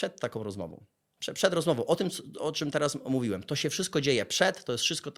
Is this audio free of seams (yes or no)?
yes